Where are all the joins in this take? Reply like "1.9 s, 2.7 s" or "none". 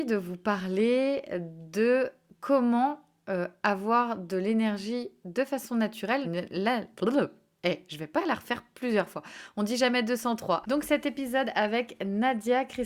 6.2 s, 10.6 s